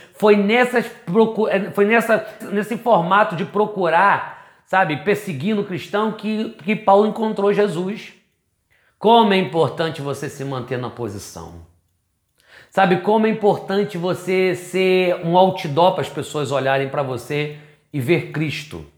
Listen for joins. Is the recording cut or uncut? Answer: cut